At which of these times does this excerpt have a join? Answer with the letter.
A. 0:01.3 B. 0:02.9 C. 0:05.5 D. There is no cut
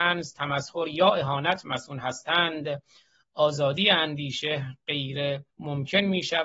C